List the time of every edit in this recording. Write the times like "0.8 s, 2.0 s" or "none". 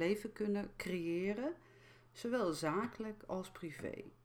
none

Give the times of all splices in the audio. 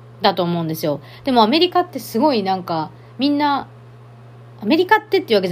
none

